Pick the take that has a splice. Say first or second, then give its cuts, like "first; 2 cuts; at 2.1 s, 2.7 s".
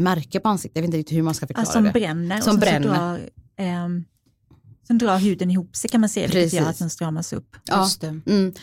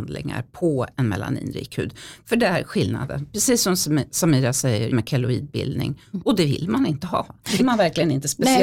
second; 2 cuts; at 4.9 s, 7.6 s